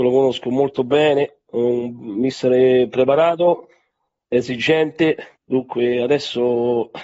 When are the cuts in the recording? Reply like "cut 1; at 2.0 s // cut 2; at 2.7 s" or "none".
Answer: cut 1; at 5.4 s